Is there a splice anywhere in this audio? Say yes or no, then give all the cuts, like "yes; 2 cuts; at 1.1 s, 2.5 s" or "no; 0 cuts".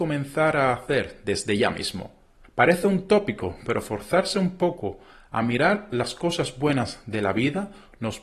yes; 1 cut; at 2.4 s